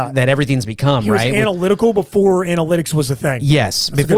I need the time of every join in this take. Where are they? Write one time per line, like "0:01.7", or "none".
none